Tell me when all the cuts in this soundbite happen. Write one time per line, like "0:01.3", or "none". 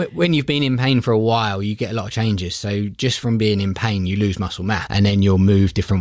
0:04.9

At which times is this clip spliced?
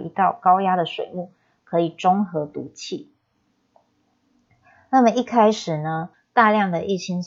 0:06.1

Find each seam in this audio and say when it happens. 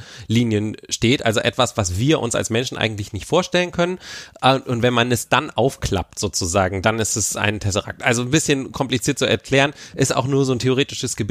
none

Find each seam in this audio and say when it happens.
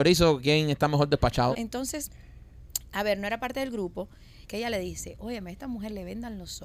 0:01.5
0:04.4

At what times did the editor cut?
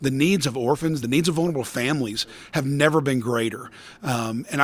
0:01.0

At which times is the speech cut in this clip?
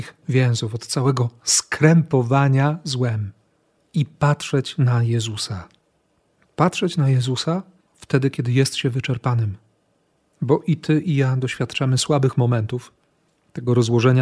none

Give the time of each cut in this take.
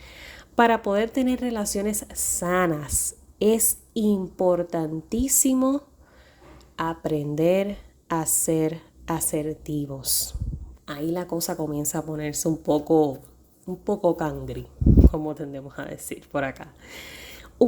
0:10.7

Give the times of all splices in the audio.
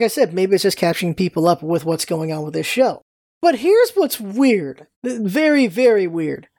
0:04.9

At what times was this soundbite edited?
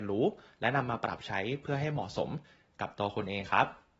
none

